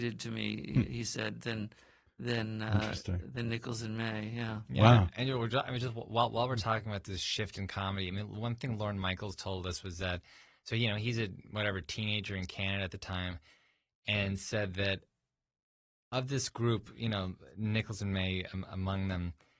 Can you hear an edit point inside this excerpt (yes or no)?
no